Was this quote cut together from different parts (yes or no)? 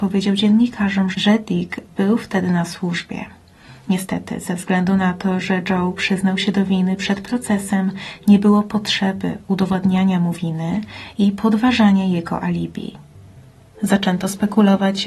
yes